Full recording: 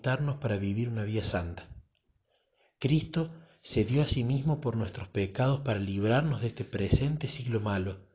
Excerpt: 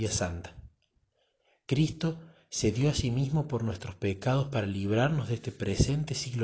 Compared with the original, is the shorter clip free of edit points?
yes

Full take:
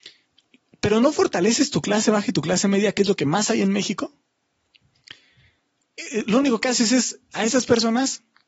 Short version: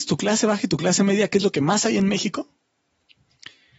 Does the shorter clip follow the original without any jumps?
yes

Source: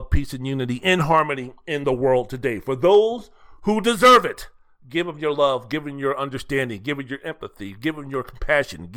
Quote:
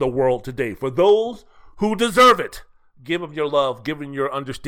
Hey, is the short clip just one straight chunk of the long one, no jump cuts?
yes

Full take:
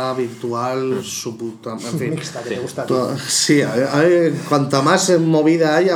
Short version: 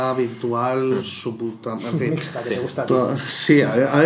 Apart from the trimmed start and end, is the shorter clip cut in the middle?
no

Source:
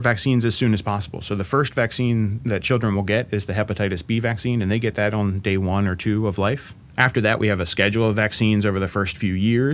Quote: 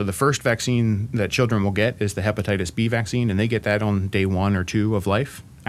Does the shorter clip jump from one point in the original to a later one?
no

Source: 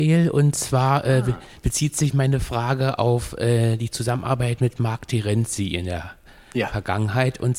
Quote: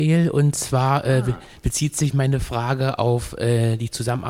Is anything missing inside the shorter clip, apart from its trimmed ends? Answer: no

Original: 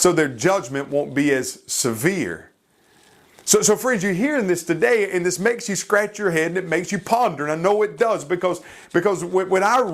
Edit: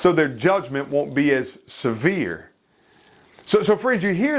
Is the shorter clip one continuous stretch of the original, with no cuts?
yes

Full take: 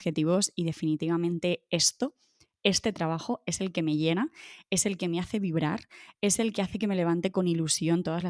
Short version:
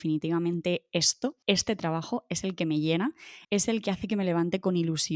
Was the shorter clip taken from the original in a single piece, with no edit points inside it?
no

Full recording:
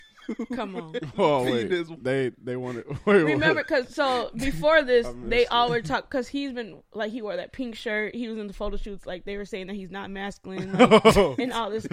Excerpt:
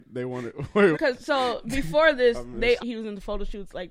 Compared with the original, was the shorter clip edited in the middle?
yes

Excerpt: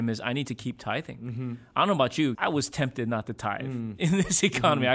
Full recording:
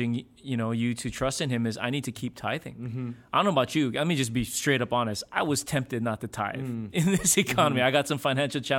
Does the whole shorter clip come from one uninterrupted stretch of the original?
no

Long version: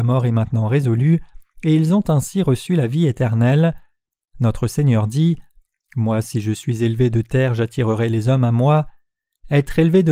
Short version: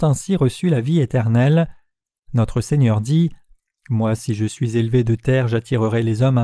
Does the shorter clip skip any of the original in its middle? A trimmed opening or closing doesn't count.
no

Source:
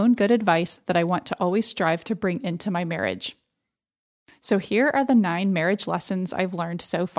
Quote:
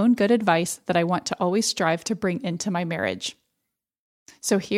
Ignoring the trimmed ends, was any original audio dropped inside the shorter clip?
no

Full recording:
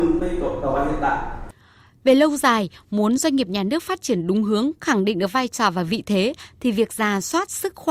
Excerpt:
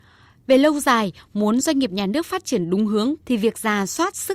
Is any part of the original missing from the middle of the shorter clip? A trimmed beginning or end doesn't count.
yes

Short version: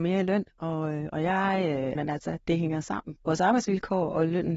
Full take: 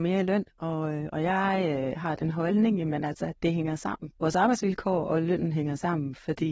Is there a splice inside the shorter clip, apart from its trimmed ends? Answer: yes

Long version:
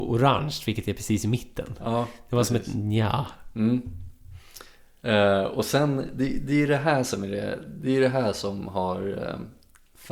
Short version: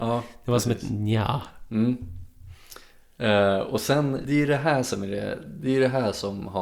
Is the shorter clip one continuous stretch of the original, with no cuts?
no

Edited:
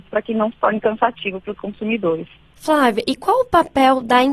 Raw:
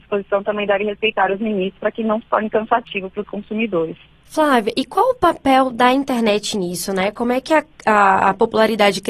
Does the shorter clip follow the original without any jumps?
yes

